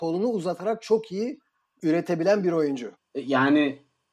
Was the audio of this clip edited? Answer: yes; 2 cuts; at 1.8 s, 3.0 s

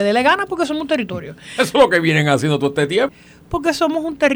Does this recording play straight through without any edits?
no; 1 cut; at 3.1 s

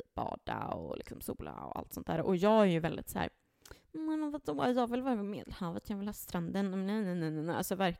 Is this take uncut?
yes; 0 cuts

